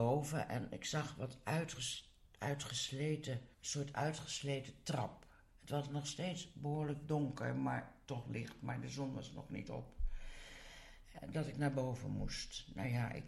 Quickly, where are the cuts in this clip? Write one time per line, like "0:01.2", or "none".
0:03.5